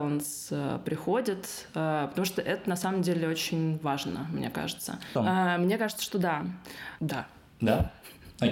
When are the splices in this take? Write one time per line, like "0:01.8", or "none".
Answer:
0:05.1
0:07.0